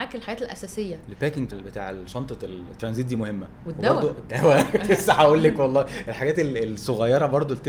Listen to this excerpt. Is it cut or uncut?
cut